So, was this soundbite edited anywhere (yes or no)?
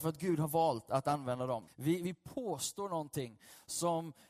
yes